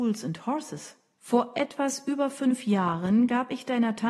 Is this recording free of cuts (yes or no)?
no